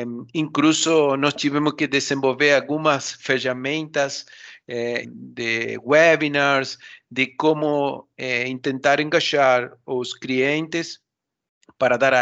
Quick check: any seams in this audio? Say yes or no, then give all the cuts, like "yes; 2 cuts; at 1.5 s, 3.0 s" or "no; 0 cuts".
yes; 1 cut; at 5.0 s